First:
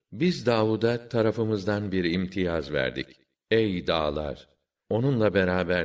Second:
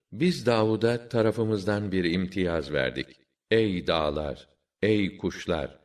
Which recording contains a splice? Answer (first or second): first